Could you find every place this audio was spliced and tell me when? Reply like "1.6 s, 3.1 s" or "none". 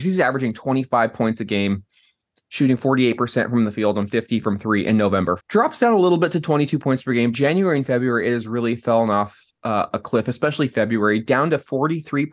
5.4 s, 7.3 s